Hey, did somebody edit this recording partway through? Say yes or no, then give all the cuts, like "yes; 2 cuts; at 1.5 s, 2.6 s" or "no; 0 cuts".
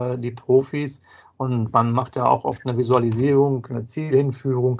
no; 0 cuts